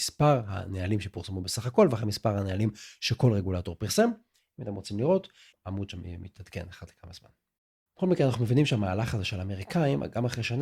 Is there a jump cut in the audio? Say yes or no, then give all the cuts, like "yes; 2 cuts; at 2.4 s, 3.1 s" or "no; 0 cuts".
yes; 2 cuts; at 5.5 s, 7.9 s